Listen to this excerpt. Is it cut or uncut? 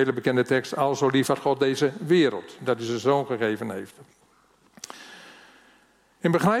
uncut